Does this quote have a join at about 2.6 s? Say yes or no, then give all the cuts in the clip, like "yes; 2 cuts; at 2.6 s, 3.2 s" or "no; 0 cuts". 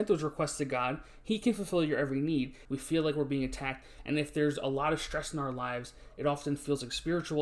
yes; 1 cut; at 2.6 s